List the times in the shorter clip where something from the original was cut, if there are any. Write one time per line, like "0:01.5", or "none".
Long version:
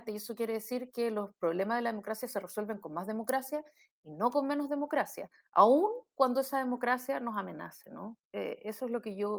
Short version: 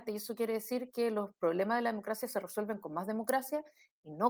none